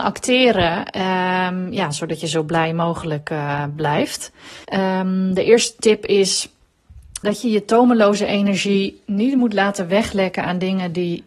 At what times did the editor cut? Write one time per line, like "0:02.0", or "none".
0:04.6
0:07.2